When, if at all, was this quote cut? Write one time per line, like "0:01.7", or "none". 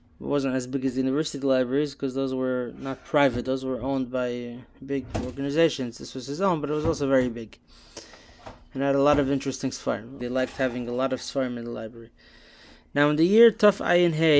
0:10.2